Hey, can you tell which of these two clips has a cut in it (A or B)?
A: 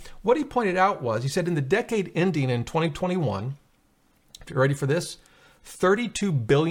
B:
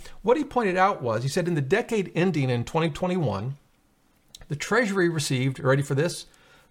A